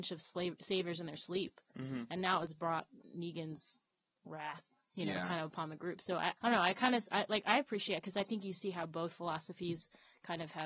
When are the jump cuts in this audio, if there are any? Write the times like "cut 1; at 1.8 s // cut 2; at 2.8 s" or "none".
cut 1; at 6.4 s